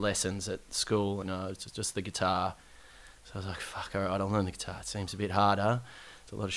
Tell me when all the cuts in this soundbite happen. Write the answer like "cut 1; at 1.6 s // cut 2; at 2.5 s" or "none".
cut 1; at 1.2 s